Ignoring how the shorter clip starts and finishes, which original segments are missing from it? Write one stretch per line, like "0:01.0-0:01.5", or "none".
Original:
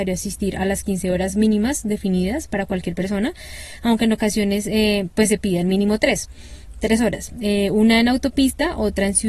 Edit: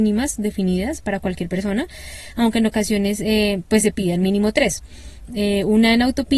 0:06.7-0:07.3

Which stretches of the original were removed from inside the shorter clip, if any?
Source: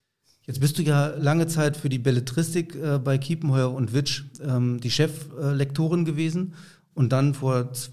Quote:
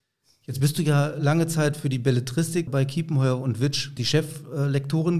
0:02.7-0:03.0
0:04.3-0:04.8

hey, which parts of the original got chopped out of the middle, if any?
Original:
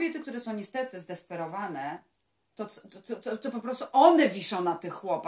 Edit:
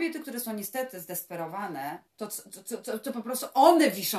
0:02.1-0:02.5

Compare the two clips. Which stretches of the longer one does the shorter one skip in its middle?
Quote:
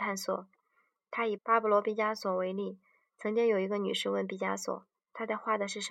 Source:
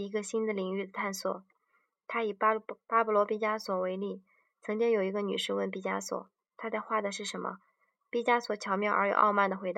0:02.3-0:02.8

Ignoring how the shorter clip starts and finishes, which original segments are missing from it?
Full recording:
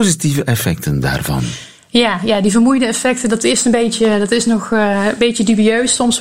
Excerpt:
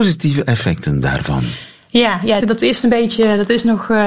0:02.4-0:03.2

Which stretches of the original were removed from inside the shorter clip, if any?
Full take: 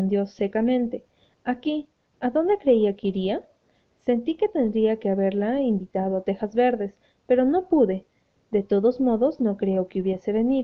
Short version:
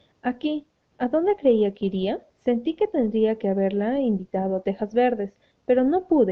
0:03.5-0:03.9

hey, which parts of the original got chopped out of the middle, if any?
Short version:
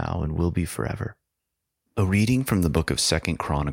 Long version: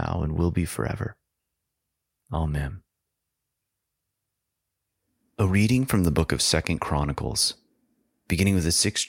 0:01.9-0:05.3

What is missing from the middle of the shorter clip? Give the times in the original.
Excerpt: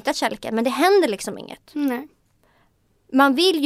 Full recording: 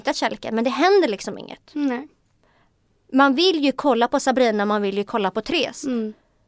none

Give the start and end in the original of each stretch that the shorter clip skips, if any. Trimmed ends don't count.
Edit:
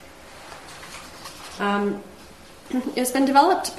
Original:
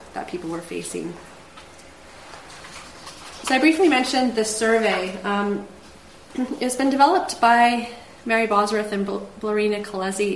0:03.4-0:05.2

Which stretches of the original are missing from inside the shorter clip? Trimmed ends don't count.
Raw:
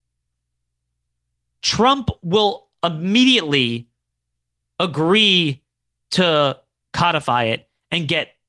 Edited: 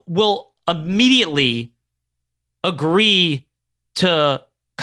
none

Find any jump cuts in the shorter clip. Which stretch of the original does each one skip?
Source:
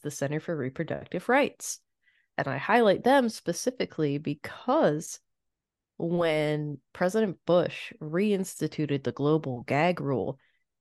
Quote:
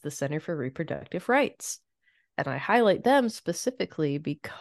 none

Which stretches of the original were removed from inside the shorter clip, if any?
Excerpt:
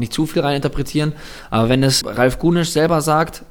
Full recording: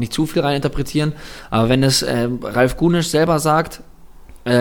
0:02.0-0:02.4

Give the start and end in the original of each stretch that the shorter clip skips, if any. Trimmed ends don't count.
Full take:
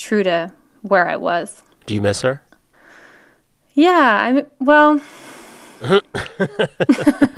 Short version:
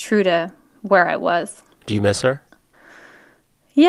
none

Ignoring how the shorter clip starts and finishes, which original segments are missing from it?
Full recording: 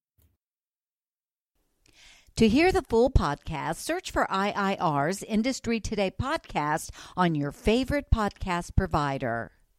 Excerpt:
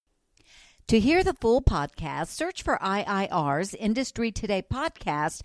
none

